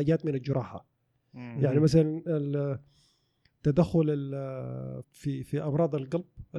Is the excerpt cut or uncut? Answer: cut